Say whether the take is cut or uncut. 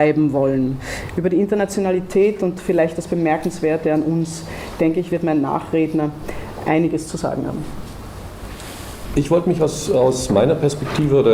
uncut